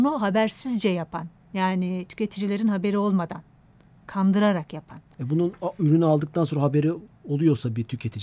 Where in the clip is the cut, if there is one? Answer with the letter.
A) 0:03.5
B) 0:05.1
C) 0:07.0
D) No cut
D